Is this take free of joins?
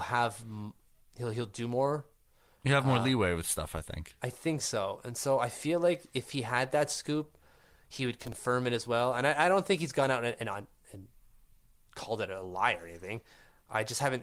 yes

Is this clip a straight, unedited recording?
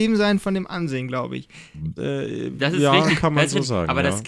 no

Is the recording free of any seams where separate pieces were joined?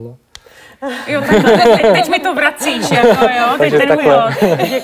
yes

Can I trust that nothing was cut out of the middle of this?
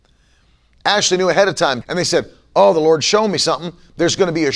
no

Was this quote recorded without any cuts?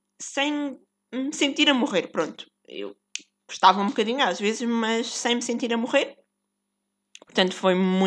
yes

